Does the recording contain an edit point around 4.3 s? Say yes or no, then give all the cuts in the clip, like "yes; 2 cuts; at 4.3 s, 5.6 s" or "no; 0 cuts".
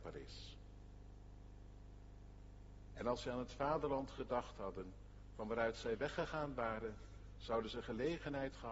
no; 1 cut; at 2.9 s